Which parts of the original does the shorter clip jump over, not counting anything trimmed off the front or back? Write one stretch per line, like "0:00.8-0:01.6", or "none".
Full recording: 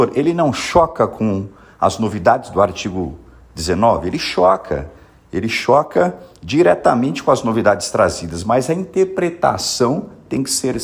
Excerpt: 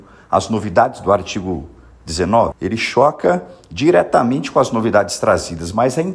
0:04.0-0:05.2